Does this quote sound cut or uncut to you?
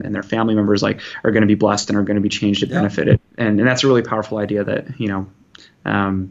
cut